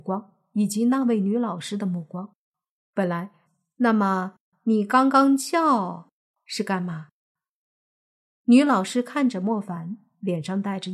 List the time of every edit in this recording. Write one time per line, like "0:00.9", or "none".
0:03.5